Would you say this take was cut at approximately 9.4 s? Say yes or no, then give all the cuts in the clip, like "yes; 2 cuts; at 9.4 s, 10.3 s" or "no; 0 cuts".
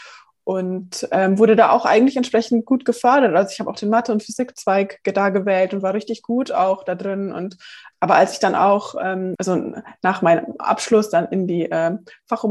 yes; 2 cuts; at 7.9 s, 9.4 s